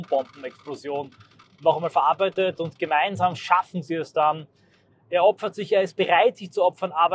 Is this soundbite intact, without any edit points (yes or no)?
no